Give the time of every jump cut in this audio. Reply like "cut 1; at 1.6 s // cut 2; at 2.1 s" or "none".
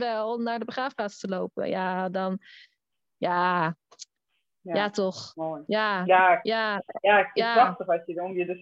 none

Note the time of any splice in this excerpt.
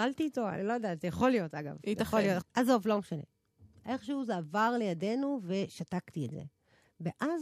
cut 1; at 2.4 s

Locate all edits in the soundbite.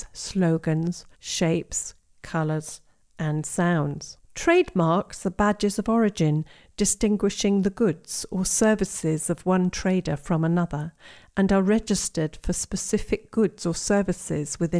cut 1; at 1.1 s // cut 2; at 4.2 s

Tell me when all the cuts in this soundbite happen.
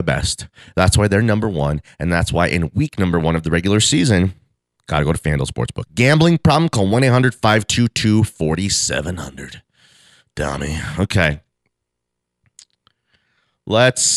cut 1; at 5.9 s

